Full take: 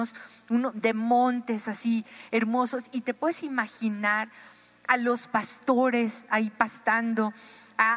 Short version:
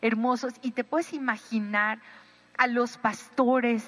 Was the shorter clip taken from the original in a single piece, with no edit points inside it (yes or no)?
yes